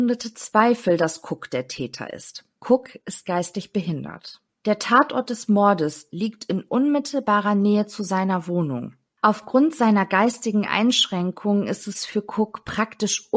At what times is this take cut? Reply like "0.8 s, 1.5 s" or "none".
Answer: 6.1 s, 9.1 s